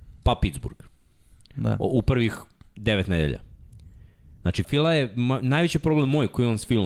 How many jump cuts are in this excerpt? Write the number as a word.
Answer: one